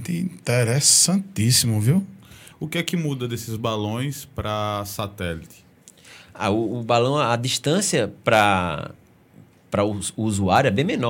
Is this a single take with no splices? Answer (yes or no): no